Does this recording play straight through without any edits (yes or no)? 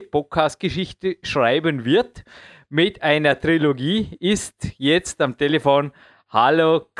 yes